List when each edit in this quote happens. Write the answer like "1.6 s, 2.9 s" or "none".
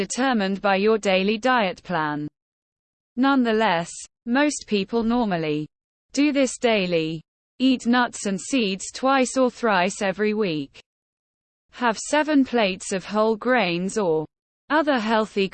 none